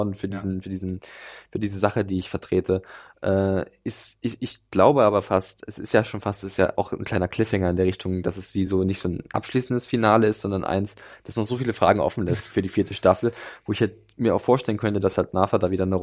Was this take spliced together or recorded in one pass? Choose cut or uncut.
uncut